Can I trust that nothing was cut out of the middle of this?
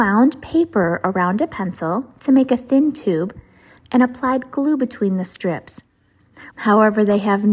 no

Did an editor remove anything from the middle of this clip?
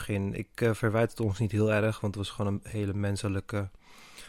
no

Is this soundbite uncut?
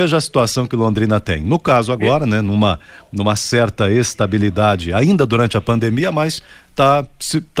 yes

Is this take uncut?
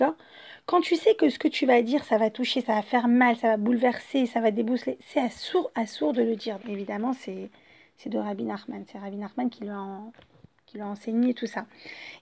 no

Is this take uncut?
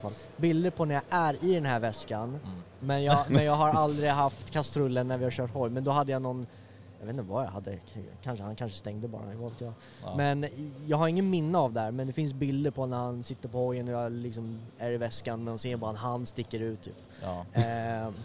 no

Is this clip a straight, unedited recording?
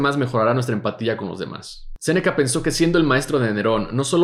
no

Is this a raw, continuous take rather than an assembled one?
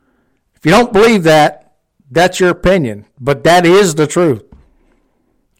yes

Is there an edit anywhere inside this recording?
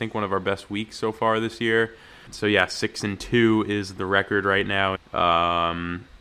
yes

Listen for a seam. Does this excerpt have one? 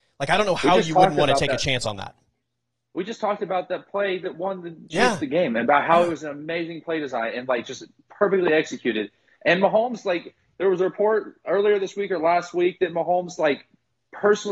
no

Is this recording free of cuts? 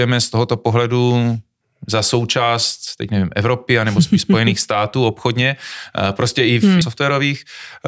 no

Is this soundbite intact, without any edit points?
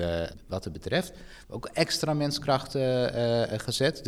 no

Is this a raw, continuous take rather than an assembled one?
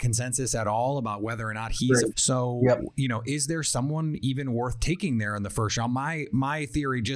no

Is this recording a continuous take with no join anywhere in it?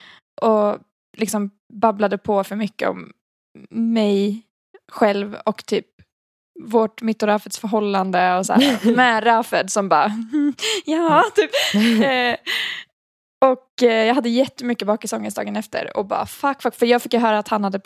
yes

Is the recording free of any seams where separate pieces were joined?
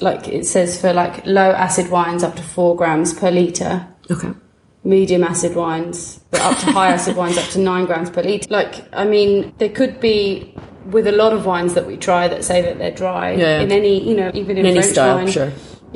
no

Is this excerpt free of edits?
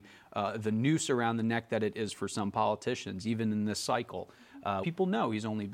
no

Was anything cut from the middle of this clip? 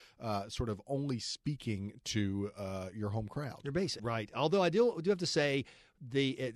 yes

